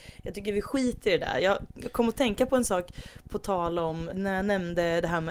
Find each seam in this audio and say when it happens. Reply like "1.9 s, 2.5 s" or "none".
4.1 s